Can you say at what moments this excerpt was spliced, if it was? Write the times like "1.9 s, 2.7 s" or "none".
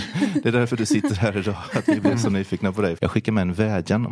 3.0 s